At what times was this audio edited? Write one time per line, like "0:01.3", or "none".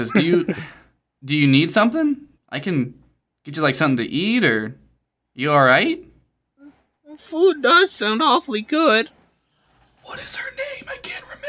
0:02.3